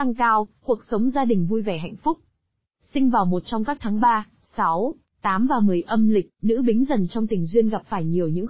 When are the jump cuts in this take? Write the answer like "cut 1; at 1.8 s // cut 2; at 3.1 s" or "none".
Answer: cut 1; at 2.6 s